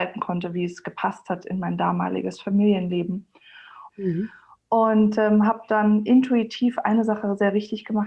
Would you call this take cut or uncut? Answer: cut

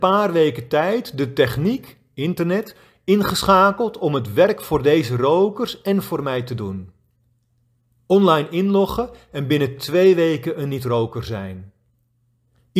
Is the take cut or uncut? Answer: uncut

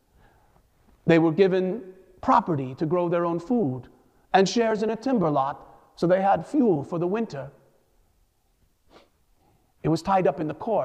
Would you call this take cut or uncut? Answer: uncut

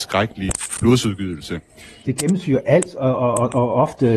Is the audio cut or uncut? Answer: cut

